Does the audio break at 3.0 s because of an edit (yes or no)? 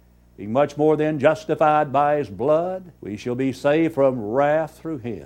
yes